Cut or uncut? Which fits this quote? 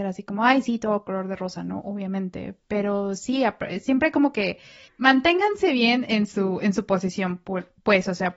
uncut